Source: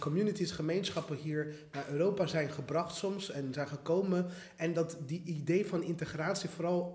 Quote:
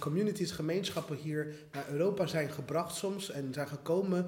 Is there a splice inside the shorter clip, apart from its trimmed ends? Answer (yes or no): no